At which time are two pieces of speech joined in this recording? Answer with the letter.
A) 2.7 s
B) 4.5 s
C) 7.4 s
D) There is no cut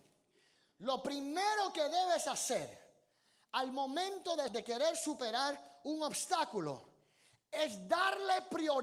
B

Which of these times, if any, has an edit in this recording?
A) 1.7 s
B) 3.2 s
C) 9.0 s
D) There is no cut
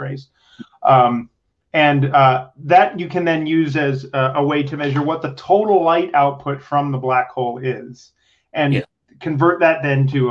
D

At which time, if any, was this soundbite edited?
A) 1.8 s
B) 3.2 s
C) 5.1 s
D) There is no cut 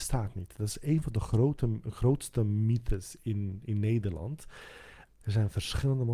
C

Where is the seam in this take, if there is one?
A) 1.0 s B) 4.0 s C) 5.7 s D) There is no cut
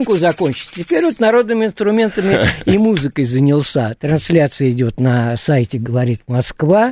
B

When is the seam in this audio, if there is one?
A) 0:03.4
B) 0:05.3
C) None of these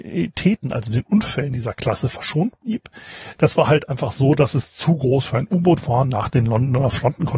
A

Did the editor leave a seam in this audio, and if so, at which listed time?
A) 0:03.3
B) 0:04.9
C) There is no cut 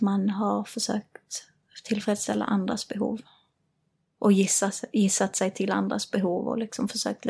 C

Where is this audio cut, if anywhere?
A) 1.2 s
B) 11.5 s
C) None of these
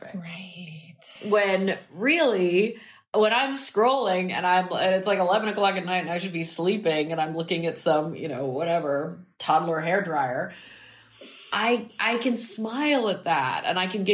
C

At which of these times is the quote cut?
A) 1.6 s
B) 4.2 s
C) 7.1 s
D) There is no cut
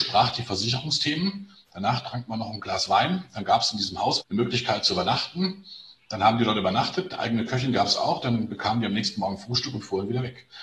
B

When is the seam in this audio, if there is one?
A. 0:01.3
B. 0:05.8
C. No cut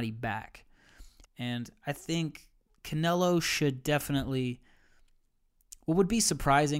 A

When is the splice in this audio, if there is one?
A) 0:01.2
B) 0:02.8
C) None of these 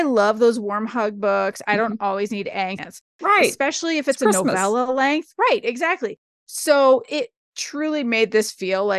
B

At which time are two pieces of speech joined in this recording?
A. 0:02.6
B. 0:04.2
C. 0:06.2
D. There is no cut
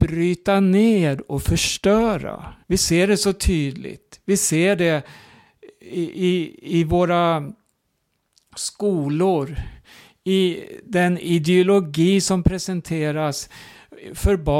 A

